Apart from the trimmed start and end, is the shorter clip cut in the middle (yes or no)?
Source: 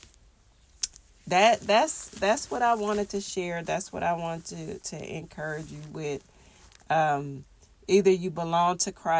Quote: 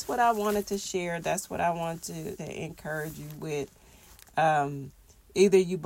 yes